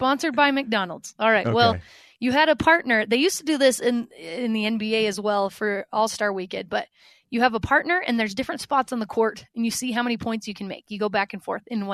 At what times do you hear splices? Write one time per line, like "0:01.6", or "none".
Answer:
none